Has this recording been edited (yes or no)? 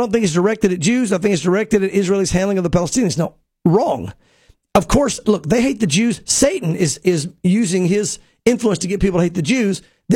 no